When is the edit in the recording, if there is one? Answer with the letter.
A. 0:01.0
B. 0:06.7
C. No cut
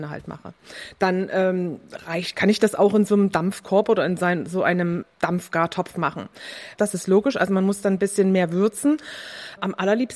B